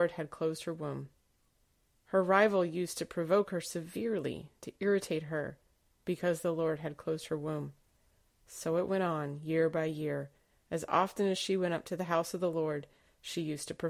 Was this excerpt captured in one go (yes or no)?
yes